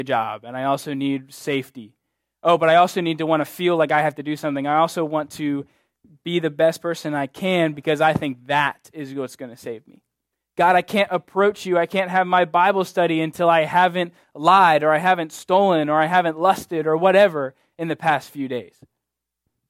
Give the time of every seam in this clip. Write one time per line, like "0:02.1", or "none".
none